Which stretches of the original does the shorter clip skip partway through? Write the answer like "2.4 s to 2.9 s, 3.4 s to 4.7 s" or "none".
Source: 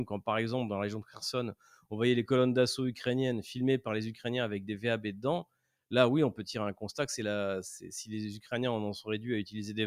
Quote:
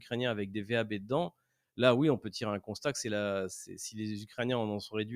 none